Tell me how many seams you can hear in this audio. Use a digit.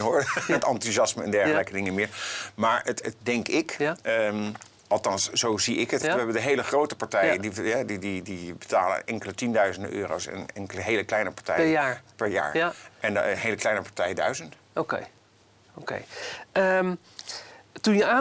2